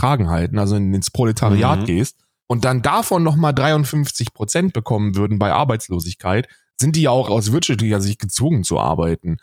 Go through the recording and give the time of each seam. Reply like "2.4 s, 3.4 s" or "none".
2.4 s, 7.3 s